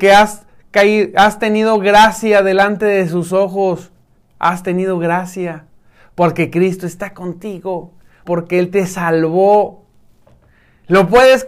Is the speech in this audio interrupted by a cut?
yes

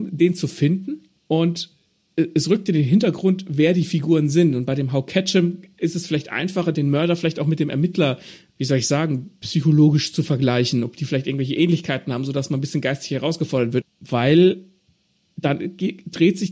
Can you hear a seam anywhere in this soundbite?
yes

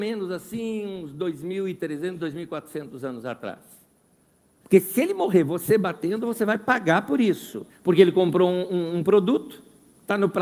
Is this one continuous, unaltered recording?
no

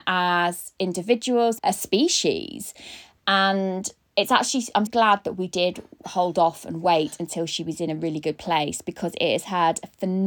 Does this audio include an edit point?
yes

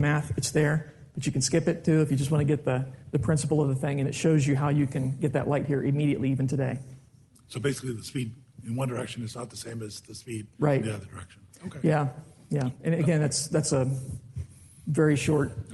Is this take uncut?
yes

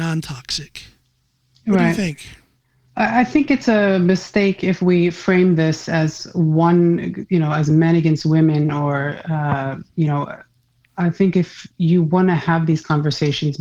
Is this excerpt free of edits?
yes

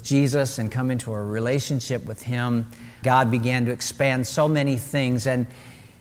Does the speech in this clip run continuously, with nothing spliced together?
no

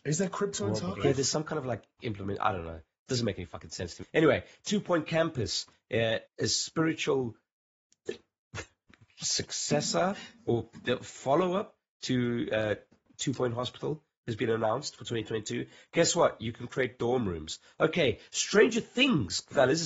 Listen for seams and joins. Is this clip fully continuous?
no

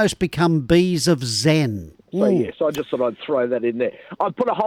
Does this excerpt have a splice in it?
yes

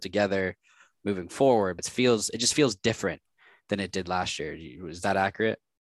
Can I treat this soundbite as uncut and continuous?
no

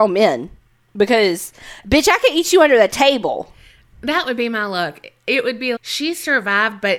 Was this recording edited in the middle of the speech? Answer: yes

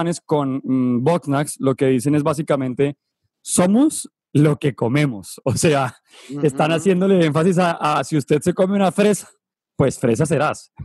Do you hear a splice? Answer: no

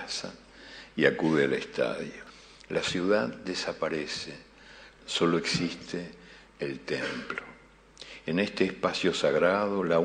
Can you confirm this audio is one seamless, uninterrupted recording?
no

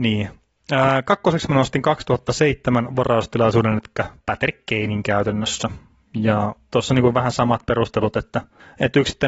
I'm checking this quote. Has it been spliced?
no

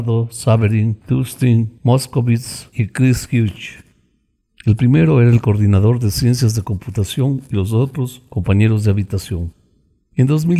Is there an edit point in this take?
no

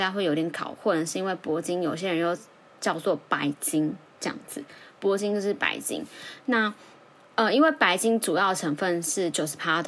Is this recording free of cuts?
yes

